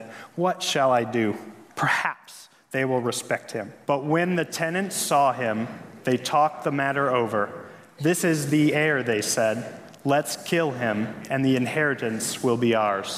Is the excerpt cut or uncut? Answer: cut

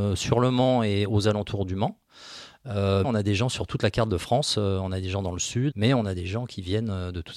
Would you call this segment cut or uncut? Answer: cut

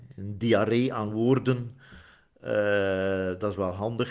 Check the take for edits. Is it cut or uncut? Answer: uncut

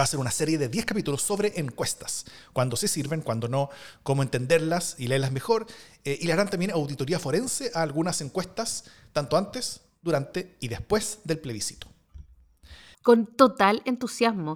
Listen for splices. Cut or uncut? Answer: cut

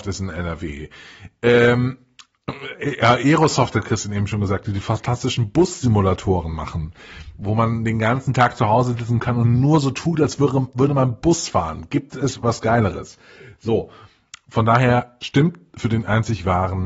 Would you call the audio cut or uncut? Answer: uncut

